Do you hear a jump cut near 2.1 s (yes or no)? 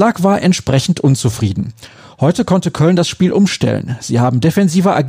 no